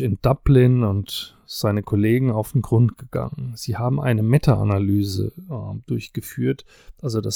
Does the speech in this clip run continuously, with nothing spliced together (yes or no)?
yes